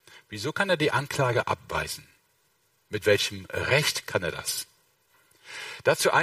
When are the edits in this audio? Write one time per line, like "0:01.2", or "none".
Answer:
none